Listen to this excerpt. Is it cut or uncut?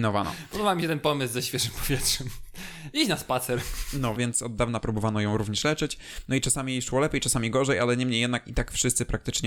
cut